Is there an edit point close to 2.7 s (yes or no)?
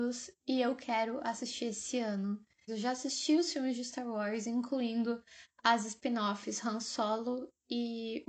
yes